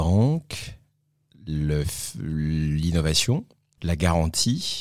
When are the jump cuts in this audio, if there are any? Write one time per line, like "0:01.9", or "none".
0:03.8